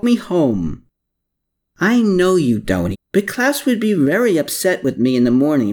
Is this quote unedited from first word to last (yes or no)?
no